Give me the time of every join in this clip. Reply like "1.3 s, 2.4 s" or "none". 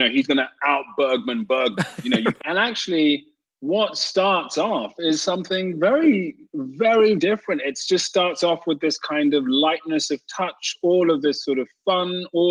2.4 s, 7.2 s